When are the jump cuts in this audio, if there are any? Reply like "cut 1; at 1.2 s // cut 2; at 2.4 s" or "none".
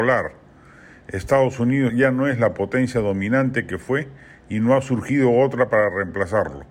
cut 1; at 1.9 s